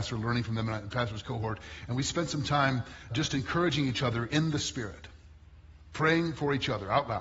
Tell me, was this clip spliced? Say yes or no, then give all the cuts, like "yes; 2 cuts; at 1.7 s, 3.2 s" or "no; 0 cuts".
yes; 1 cut; at 3.1 s